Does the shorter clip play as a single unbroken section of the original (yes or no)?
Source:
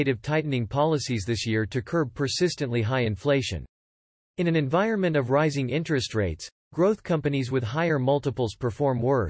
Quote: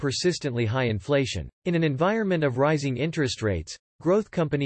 no